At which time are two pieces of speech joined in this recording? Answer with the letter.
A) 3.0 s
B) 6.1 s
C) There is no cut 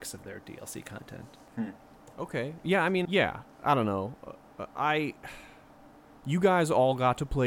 A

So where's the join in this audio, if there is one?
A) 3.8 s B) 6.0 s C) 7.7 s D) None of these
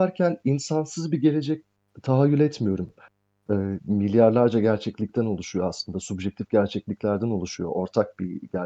A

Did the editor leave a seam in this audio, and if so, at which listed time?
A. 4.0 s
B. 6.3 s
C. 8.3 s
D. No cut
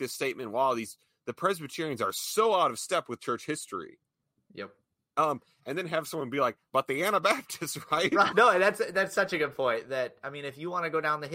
C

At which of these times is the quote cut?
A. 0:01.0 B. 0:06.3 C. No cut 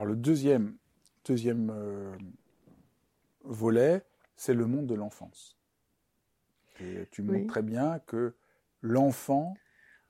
C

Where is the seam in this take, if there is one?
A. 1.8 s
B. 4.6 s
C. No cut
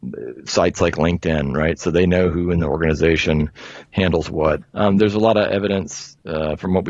B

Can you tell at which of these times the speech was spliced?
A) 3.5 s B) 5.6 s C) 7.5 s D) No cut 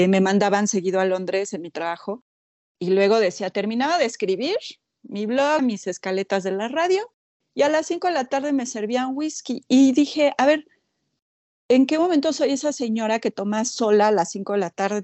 B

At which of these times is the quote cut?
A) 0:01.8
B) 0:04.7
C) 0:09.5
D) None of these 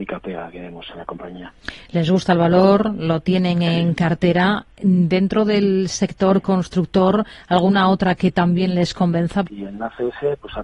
C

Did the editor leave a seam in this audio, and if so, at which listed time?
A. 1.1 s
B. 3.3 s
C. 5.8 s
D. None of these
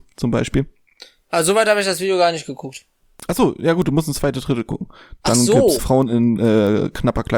C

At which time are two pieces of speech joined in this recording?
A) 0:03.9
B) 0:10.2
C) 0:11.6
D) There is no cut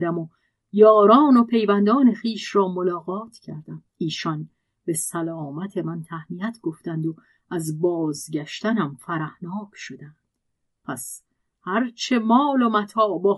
A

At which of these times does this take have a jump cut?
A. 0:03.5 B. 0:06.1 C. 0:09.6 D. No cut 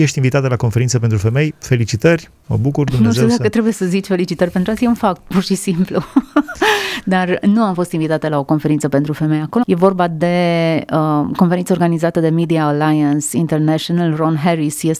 C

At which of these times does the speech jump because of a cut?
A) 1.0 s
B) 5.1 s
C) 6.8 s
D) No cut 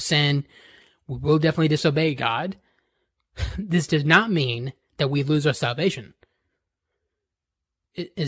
D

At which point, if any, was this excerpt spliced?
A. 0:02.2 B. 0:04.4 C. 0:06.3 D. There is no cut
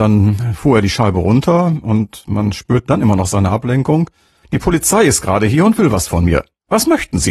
B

